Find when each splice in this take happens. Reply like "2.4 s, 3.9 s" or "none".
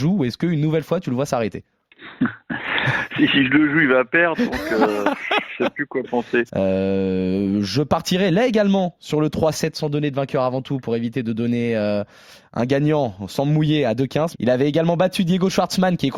6.5 s, 14.3 s